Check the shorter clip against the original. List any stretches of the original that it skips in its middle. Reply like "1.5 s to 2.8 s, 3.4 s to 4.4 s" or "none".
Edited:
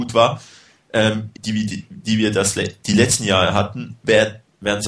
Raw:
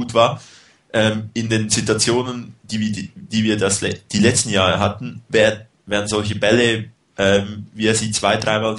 1.3 s to 2.6 s